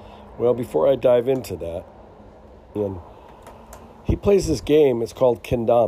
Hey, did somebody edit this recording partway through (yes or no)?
yes